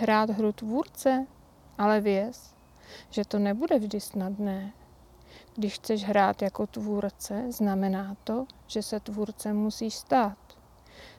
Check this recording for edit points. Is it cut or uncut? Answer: cut